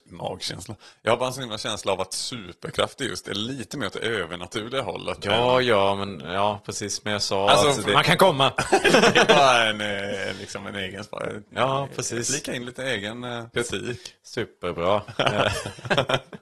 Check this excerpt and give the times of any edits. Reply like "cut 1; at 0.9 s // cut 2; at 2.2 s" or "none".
cut 1; at 7.9 s // cut 2; at 13.5 s